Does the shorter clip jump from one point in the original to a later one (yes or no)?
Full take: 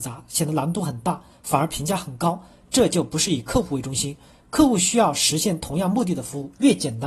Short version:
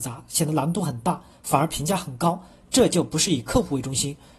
no